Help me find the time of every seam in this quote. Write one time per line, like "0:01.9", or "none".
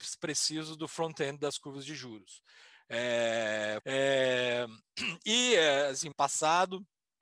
0:03.8
0:06.1